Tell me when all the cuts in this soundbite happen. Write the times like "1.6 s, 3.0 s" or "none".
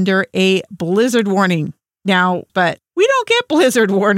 2.5 s